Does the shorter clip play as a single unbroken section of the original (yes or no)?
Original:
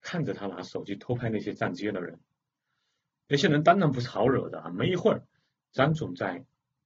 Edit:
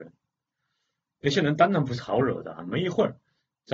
yes